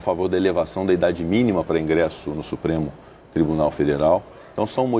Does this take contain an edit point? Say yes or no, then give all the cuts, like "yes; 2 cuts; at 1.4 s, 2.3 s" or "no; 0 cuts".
no; 0 cuts